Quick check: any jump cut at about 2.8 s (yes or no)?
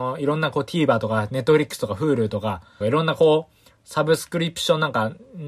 yes